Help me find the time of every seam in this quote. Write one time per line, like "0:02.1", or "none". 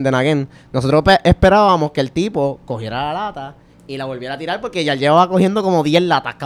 none